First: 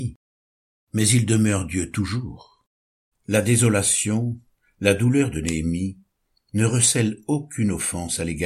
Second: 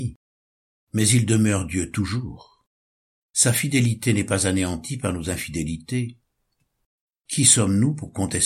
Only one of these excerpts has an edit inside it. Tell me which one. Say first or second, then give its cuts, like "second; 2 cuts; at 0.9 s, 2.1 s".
first; 1 cut; at 3.1 s